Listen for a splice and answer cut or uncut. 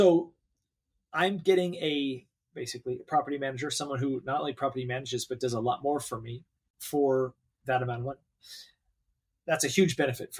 cut